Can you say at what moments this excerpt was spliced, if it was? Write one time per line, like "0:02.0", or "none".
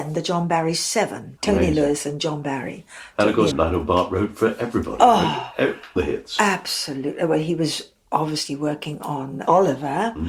0:01.4
0:03.5
0:06.0